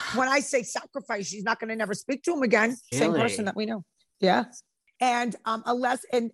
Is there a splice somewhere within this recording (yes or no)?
yes